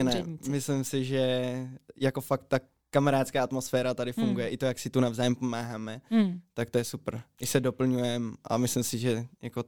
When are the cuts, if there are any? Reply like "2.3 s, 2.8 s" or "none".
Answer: none